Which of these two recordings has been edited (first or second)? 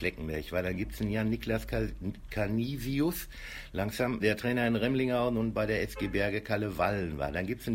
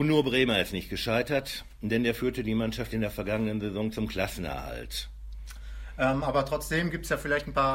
first